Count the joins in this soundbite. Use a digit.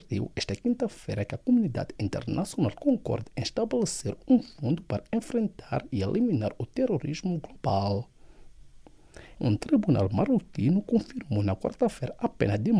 1